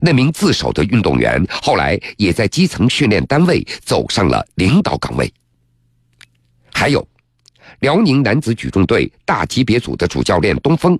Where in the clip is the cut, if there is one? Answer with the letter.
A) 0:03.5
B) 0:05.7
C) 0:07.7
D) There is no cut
D